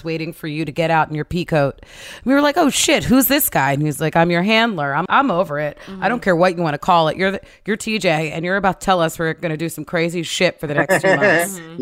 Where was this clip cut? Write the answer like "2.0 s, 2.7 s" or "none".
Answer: 5.1 s